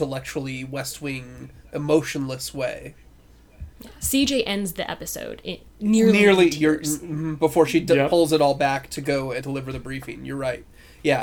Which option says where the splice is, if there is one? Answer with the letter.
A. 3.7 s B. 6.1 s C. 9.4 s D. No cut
C